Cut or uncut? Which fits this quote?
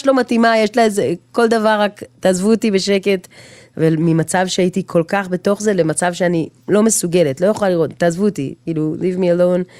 uncut